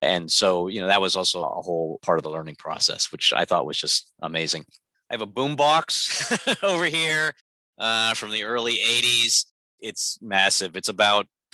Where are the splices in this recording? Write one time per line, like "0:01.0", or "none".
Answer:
none